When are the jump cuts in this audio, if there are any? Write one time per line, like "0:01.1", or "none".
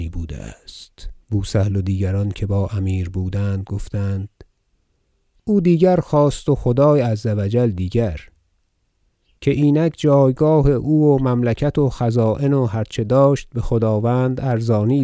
0:01.2